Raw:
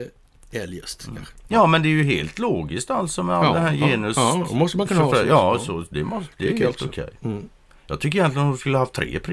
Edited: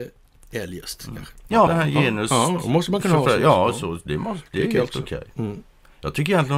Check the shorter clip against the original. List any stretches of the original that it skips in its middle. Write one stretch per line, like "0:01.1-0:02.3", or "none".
0:01.7-0:03.5

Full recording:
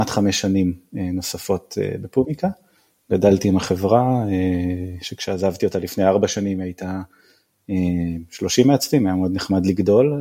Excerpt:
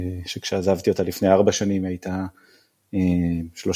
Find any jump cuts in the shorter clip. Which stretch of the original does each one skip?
none

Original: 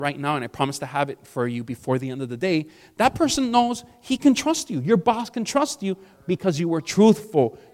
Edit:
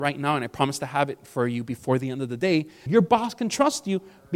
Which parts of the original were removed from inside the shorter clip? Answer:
0:02.9-0:04.8

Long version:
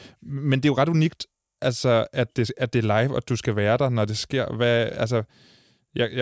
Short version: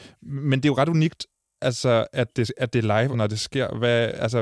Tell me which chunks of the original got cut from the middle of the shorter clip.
0:03.1-0:03.9

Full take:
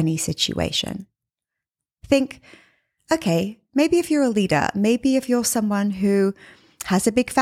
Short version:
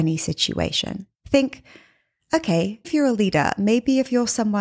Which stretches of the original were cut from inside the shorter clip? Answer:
0:01.1-0:01.9
0:03.6-0:04.0

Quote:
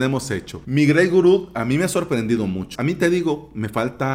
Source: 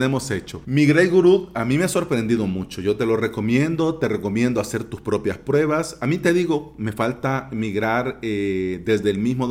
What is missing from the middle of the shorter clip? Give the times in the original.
0:02.8-0:06.0

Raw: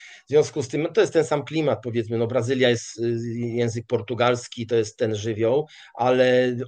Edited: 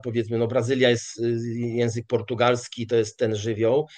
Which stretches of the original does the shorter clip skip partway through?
none

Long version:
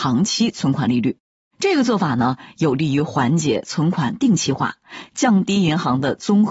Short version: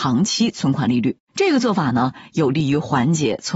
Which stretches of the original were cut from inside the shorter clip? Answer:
0:01.2-0:01.5

